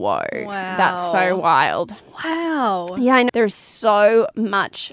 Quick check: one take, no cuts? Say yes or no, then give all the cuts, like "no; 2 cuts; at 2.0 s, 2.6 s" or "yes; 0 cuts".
no; 1 cut; at 3.3 s